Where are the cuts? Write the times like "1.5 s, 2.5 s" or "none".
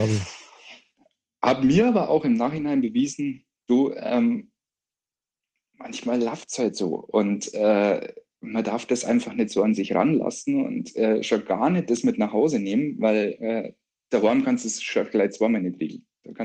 none